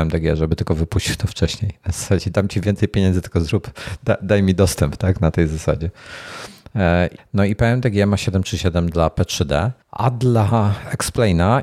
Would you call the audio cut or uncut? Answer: cut